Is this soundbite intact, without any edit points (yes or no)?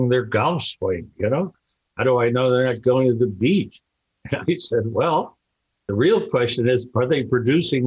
yes